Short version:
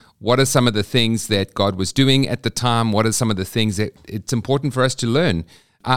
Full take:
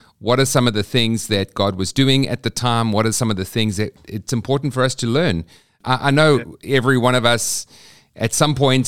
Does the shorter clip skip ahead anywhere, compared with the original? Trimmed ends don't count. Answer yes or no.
no